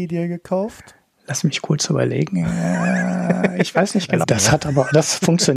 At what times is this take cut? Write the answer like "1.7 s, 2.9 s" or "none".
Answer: 4.2 s

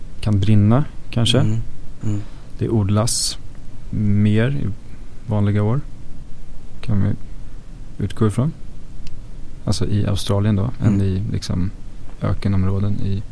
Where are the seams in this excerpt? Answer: 2.0 s

